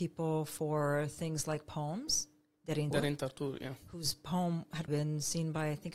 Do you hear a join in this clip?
yes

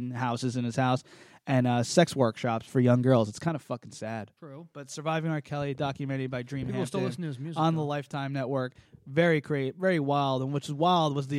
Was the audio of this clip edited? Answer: yes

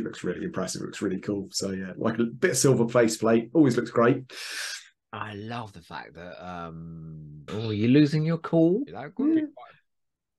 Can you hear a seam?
yes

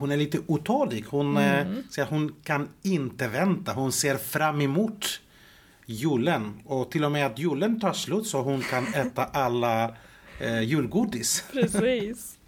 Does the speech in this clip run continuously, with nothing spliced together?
yes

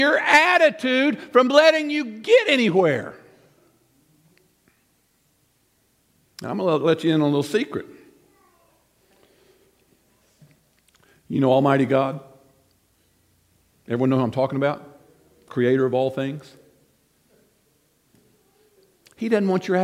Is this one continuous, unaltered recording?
yes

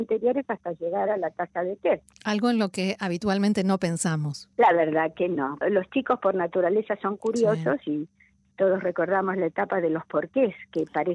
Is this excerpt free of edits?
no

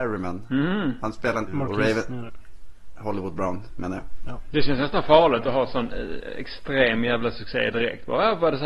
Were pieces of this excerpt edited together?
yes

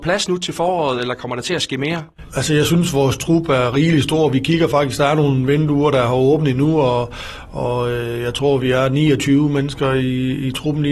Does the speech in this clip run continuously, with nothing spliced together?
no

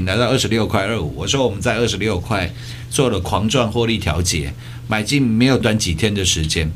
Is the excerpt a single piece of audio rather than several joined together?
no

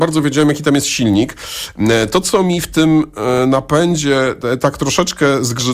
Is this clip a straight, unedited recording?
yes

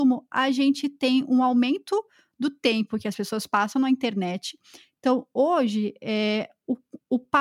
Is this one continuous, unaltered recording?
yes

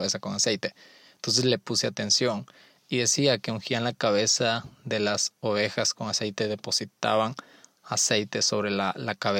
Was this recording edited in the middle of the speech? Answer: no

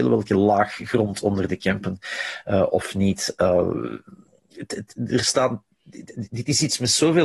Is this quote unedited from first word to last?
yes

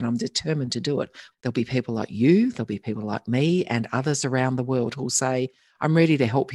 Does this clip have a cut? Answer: yes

